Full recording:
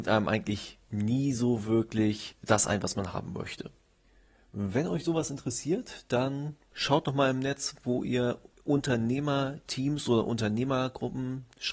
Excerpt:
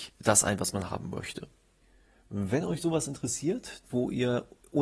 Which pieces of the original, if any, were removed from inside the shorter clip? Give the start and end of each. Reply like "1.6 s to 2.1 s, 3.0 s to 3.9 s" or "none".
6.1 s to 7.8 s